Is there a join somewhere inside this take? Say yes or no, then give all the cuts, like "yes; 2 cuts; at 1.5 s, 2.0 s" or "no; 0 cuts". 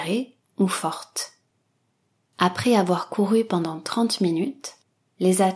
no; 0 cuts